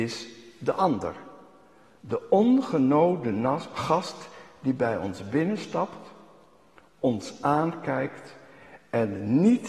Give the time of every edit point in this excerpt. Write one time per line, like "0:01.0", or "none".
none